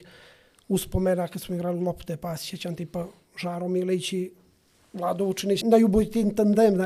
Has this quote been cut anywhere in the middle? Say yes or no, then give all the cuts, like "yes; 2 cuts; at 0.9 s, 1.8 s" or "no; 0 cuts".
yes; 1 cut; at 5.6 s